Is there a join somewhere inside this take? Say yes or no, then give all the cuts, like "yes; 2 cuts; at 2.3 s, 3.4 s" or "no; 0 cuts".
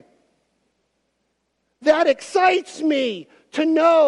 no; 0 cuts